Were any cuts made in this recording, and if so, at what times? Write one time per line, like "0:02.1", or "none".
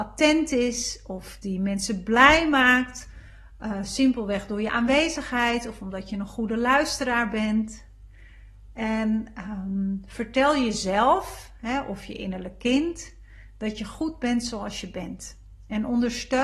none